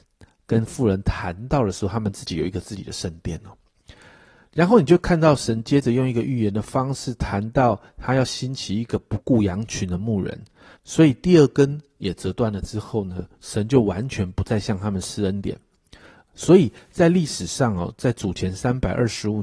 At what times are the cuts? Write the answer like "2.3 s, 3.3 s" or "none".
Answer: 10.8 s